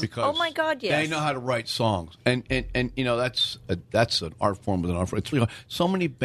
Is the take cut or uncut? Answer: cut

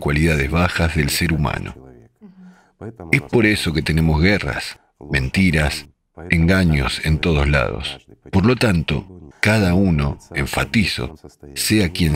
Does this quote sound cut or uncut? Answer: cut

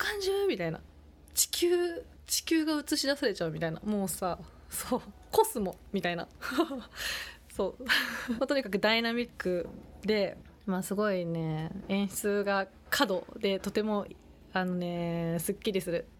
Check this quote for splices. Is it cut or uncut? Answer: cut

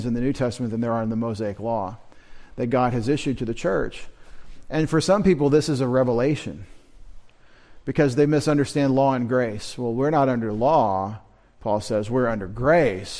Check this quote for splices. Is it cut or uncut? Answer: uncut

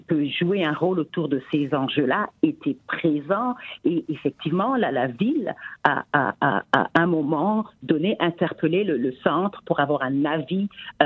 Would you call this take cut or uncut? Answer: uncut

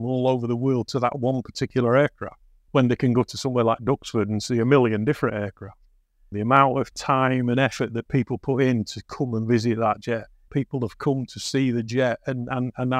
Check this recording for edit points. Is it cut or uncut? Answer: cut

